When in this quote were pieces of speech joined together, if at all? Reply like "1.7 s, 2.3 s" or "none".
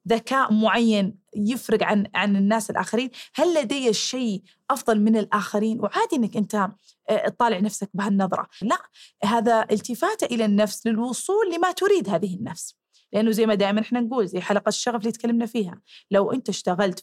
8.6 s